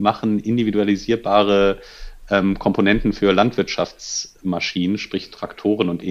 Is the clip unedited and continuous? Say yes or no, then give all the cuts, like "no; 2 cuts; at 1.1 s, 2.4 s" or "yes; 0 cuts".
yes; 0 cuts